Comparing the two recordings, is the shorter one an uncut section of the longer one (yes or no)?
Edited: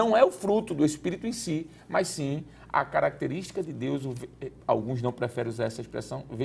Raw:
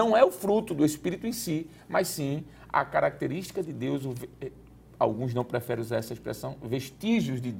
no